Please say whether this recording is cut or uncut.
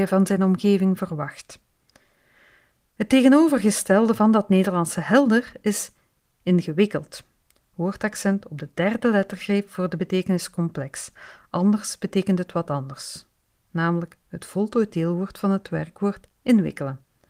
uncut